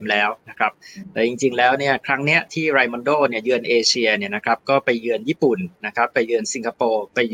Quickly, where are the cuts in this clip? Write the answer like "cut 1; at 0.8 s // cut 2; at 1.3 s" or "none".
none